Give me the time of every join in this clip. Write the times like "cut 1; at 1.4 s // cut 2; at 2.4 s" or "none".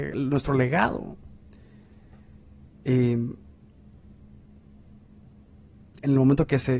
cut 1; at 2.7 s